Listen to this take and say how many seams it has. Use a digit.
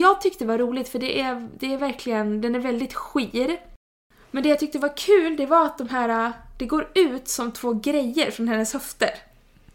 0